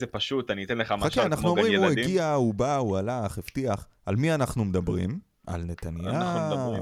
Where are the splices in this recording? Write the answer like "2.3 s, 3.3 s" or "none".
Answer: none